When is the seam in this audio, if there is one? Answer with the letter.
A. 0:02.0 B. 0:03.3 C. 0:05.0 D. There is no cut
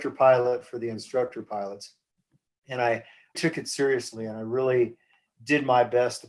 B